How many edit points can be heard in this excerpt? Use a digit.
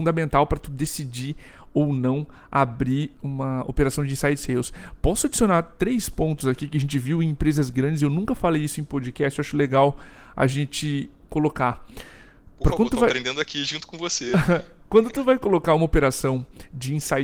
0